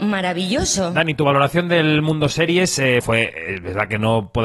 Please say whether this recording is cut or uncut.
cut